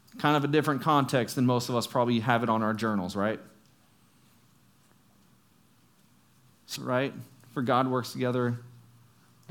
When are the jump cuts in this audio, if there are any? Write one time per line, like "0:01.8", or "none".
0:06.8